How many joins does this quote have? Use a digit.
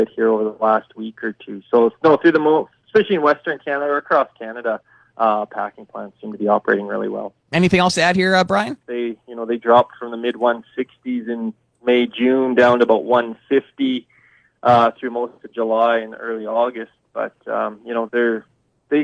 2